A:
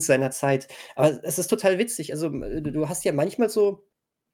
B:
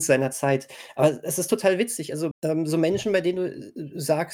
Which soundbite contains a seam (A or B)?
B